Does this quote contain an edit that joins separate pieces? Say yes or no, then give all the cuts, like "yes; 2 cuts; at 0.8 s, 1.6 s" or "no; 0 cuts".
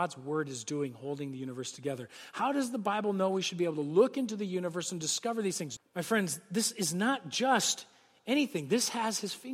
yes; 1 cut; at 5.8 s